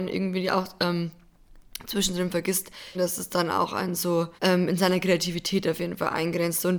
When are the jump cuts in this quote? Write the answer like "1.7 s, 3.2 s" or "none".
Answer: 2.9 s, 4.4 s